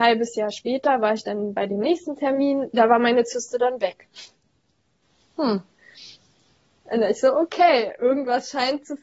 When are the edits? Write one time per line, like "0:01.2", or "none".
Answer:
none